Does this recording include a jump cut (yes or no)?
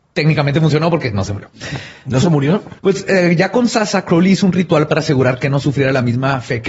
yes